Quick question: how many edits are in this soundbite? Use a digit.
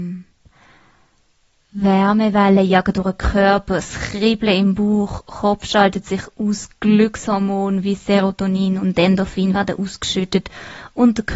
0